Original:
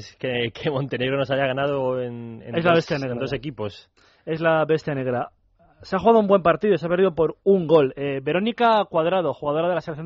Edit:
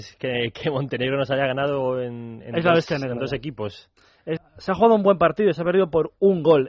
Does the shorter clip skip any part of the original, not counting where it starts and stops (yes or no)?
yes